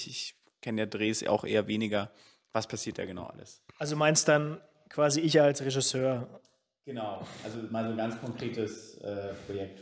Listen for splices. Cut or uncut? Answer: cut